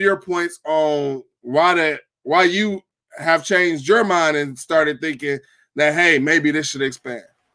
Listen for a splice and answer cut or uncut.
uncut